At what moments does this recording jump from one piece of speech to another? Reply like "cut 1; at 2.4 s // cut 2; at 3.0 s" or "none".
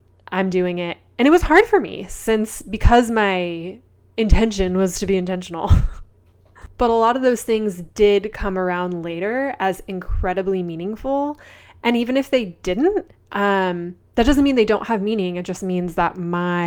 none